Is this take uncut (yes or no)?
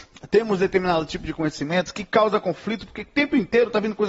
yes